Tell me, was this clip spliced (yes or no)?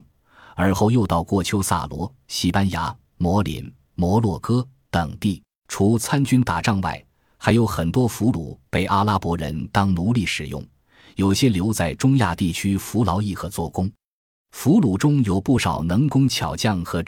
yes